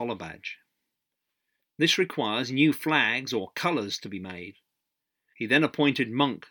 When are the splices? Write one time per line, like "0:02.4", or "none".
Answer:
0:01.7
0:05.3